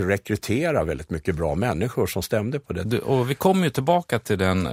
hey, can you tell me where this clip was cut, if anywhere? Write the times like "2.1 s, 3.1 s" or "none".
2.9 s